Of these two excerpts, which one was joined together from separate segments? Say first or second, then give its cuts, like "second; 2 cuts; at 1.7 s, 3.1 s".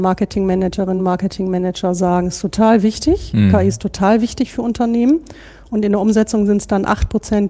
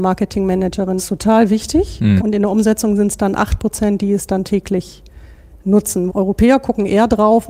second; 3 cuts; at 1.0 s, 2.2 s, 6.1 s